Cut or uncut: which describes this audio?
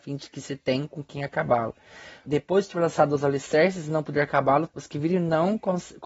cut